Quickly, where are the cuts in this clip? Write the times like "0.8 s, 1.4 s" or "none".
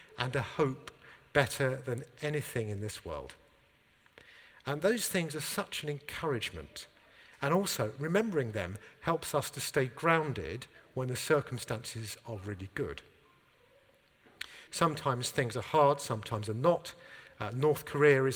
14.7 s